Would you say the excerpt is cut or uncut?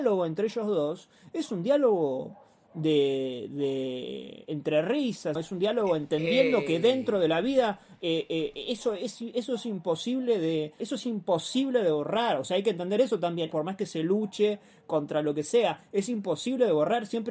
cut